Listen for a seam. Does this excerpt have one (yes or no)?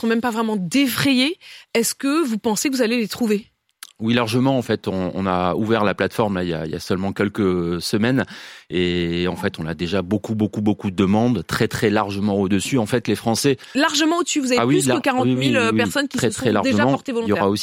no